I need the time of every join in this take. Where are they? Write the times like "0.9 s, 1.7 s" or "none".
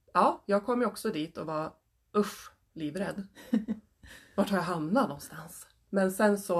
none